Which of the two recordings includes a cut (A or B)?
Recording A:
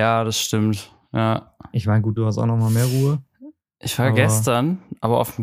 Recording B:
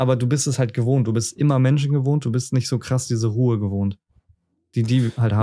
A